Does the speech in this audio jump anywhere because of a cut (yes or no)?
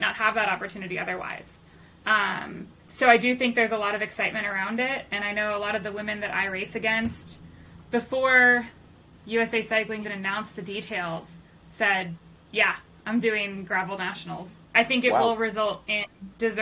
yes